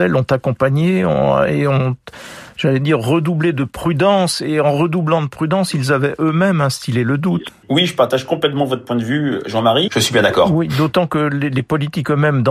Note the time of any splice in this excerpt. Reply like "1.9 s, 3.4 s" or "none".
7.5 s, 9.9 s